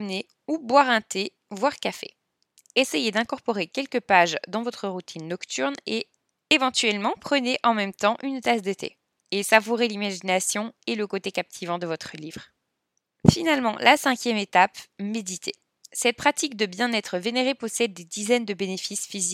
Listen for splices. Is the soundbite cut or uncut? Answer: uncut